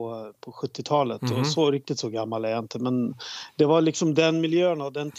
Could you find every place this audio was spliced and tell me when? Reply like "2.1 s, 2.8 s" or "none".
none